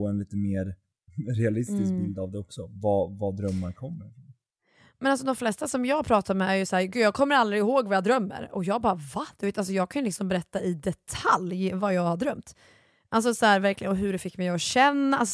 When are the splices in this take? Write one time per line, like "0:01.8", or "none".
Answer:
none